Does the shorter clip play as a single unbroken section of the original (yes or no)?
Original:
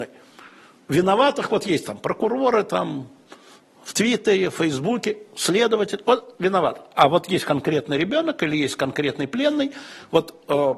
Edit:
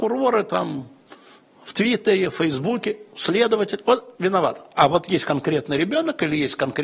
yes